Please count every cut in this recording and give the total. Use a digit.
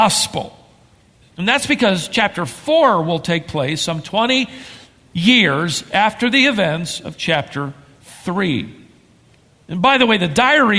1